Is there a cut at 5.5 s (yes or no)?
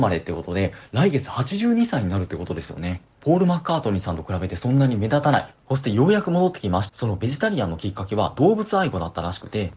yes